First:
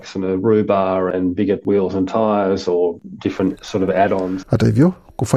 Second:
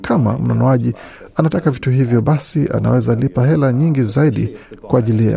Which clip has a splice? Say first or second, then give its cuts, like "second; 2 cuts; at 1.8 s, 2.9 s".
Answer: first; 1 cut; at 4.4 s